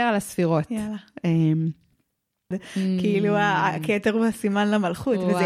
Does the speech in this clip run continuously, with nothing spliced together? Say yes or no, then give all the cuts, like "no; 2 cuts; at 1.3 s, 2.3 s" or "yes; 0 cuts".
no; 1 cut; at 2.5 s